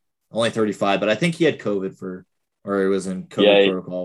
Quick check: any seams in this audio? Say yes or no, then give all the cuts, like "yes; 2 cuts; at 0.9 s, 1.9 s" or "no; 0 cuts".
no; 0 cuts